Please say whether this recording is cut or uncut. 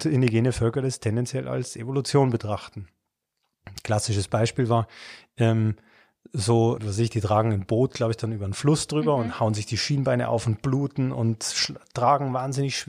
cut